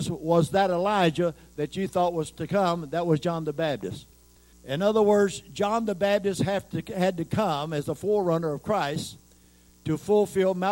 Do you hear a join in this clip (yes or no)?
yes